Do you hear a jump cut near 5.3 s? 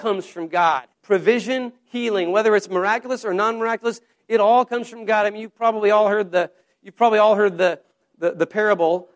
no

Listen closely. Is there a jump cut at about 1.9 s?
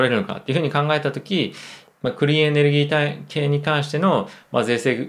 yes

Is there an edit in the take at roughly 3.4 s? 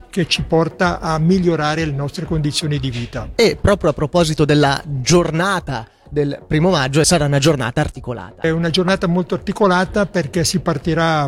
no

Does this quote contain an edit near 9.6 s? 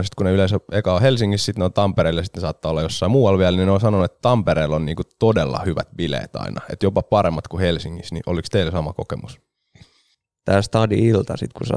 no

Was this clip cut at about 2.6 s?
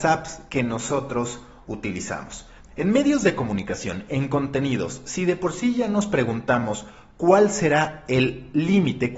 yes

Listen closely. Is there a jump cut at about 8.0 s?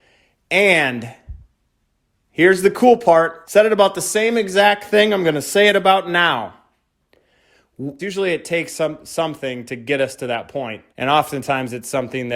yes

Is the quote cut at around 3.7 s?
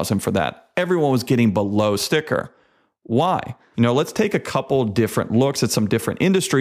yes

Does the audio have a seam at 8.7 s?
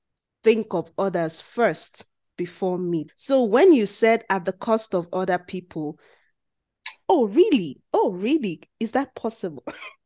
no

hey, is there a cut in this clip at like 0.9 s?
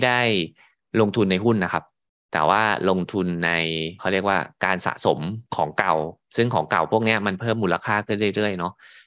no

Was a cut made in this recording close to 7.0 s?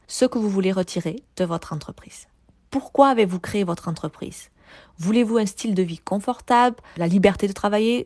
yes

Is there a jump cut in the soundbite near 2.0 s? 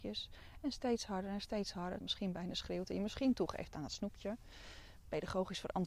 yes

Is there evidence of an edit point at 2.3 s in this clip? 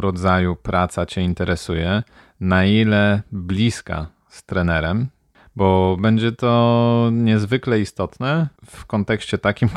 no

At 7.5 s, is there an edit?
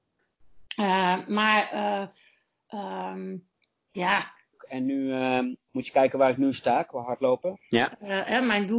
yes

